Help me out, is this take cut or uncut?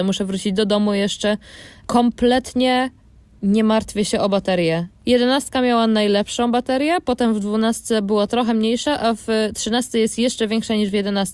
uncut